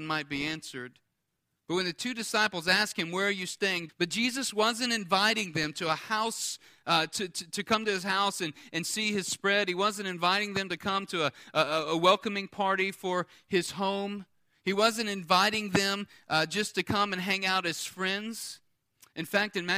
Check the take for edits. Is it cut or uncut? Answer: cut